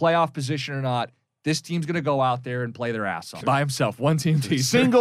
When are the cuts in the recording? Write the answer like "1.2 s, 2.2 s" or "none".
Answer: 3.4 s